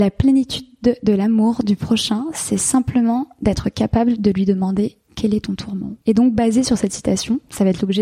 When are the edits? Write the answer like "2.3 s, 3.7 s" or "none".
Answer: 6.0 s

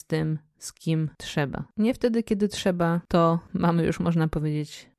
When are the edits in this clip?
none

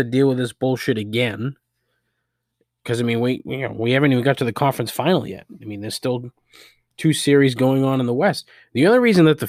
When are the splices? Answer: none

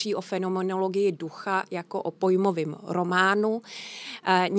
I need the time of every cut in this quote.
none

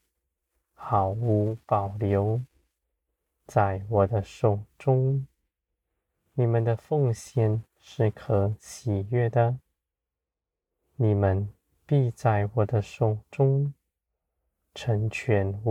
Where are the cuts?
none

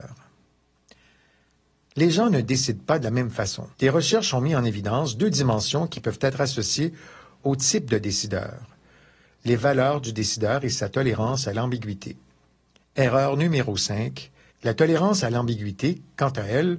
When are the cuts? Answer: 3.7 s, 12.8 s, 14.5 s

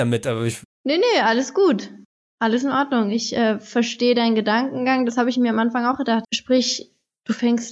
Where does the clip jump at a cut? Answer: 6.2 s

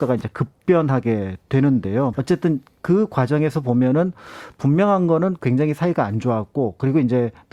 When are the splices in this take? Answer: 2.1 s

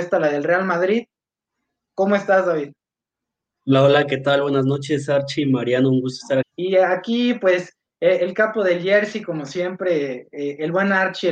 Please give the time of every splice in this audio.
6.4 s

